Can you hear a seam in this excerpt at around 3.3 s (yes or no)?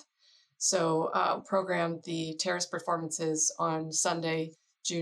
no